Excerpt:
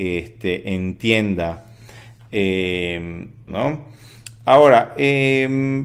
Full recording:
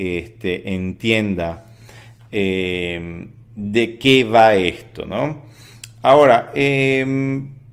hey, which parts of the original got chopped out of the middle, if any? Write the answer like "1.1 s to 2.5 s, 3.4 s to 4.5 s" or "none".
3.5 s to 5.0 s